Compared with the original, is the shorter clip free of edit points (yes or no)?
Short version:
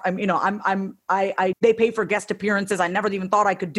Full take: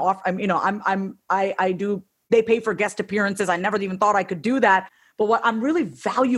no